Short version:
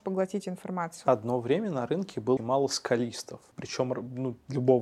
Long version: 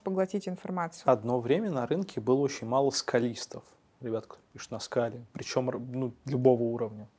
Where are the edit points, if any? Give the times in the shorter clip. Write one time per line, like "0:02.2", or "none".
0:02.4
0:03.5